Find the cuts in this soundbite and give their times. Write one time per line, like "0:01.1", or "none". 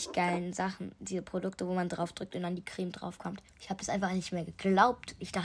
0:03.5